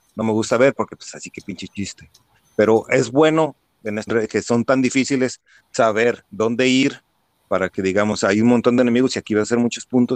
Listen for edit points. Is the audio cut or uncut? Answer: cut